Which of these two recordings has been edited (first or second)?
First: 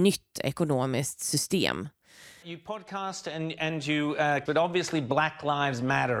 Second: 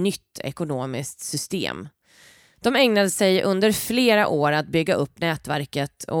first